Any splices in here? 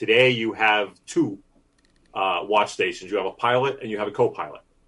no; 0 cuts

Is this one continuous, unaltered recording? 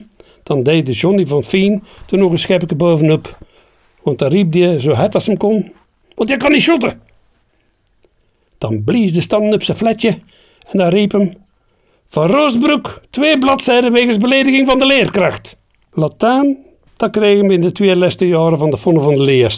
no; 2 cuts; at 6.2 s, 15.9 s

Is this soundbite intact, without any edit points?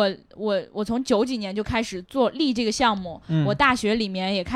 no; 1 cut; at 2.0 s

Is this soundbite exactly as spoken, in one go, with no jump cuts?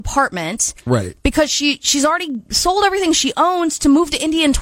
yes; 0 cuts

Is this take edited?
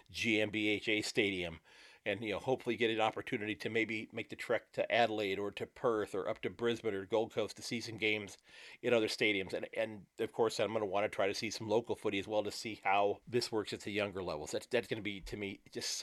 yes; 3 cuts; at 10.1 s, 13.2 s, 14.9 s

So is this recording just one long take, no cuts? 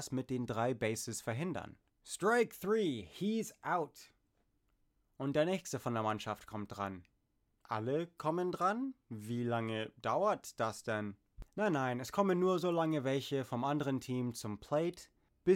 yes; 0 cuts

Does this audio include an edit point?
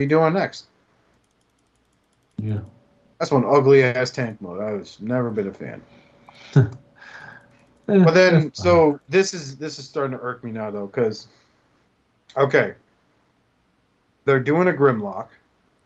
no; 0 cuts

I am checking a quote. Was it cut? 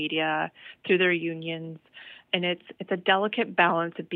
yes; 1 cut; at 2.3 s

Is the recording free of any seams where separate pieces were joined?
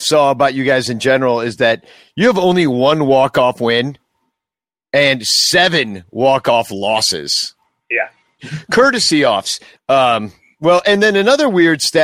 no; 2 cuts; at 8.4 s, 9.7 s

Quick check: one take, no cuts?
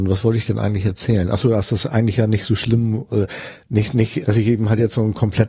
no; 1 cut; at 4.2 s

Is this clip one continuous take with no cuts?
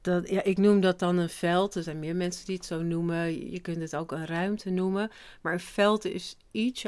yes; 0 cuts

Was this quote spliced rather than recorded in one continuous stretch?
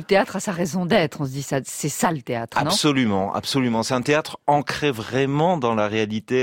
no; 0 cuts

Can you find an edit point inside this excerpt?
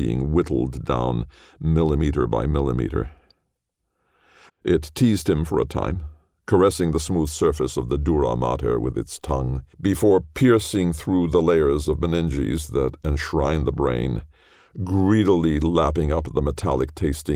yes; 2 cuts; at 4.5 s, 9.7 s

